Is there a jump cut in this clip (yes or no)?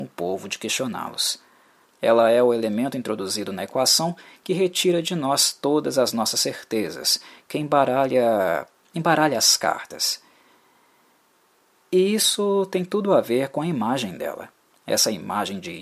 yes